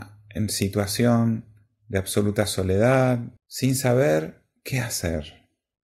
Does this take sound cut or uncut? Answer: cut